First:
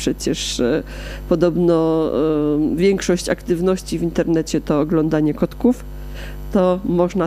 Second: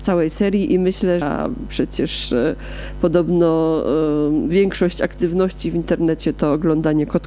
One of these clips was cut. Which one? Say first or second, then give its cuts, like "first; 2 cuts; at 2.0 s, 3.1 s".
second; 1 cut; at 1.2 s